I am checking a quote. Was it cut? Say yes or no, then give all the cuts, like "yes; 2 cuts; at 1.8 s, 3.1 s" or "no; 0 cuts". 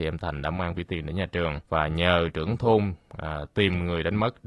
yes; 1 cut; at 1.6 s